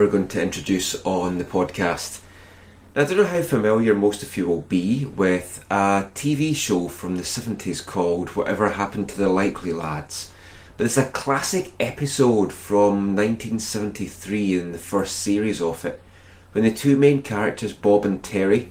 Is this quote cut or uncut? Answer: cut